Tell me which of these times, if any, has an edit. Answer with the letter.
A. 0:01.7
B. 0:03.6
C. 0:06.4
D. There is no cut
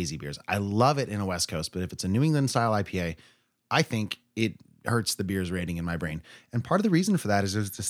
D